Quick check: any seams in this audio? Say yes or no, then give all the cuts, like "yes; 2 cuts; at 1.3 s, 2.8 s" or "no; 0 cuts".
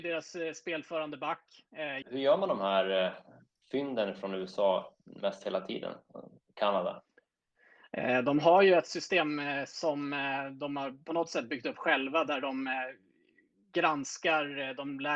yes; 1 cut; at 2.0 s